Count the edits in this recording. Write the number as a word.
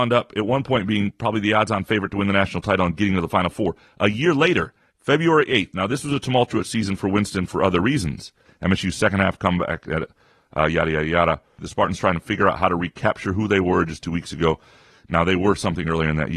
three